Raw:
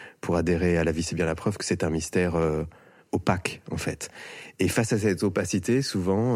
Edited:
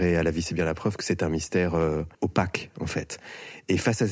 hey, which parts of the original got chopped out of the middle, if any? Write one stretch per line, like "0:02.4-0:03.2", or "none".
0:02.8-0:03.1

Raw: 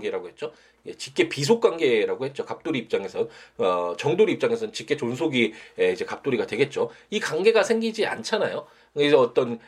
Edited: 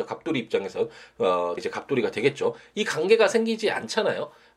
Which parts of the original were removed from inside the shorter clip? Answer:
0:04.0-0:05.9

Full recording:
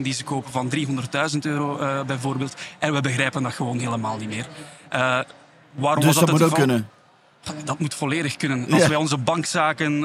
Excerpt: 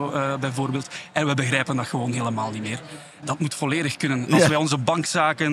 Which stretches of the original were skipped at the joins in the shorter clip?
0:04.9-0:07.6

